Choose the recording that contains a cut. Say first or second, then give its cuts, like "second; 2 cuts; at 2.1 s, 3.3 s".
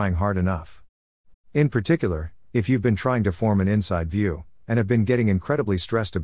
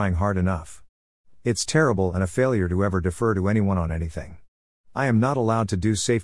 first; 1 cut; at 1.3 s